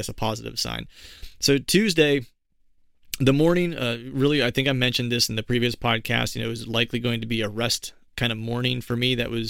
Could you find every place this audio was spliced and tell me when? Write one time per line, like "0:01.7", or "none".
none